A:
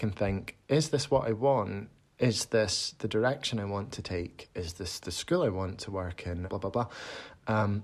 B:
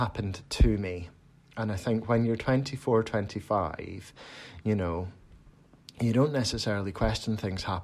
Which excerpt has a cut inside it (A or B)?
A